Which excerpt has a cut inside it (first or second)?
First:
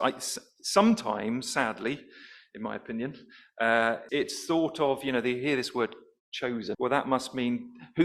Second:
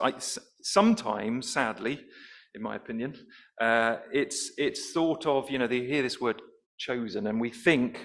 first